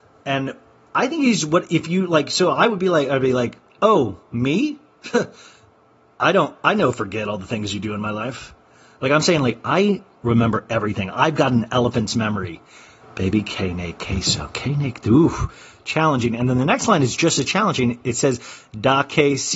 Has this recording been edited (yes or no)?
yes